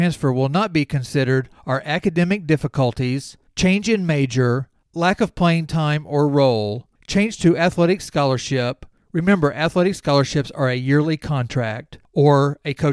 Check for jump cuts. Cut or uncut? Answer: uncut